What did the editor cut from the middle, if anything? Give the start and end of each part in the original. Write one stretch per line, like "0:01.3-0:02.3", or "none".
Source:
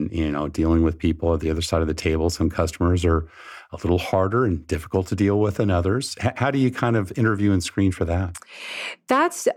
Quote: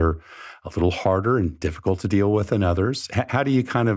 none